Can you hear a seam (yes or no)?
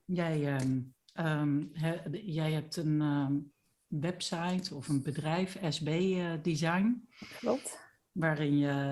no